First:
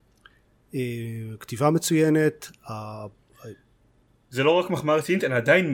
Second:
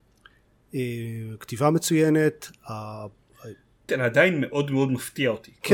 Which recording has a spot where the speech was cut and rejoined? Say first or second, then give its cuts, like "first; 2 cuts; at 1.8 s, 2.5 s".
second; 1 cut; at 3.9 s